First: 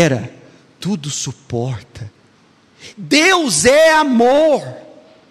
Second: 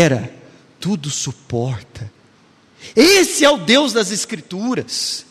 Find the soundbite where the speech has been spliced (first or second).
first